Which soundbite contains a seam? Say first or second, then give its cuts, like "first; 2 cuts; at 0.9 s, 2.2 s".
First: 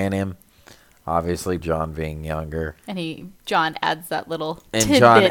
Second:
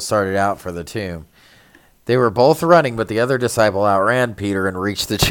first; 2 cuts; at 1.6 s, 2.8 s